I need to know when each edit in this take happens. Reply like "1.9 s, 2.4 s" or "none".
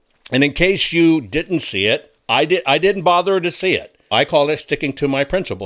4.1 s